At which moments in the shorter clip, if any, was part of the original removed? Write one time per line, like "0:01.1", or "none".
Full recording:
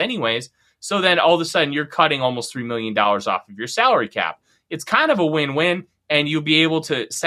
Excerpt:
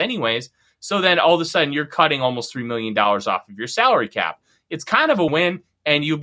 0:05.3